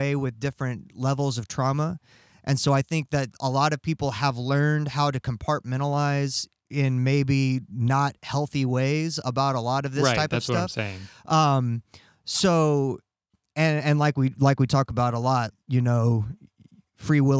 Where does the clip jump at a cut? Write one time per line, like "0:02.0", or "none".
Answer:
0:15.5